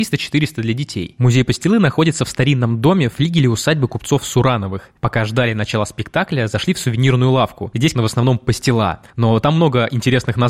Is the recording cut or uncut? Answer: cut